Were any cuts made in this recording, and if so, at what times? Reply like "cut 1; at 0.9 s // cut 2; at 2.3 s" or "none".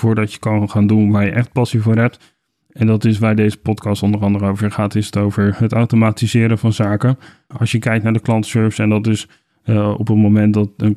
cut 1; at 7.5 s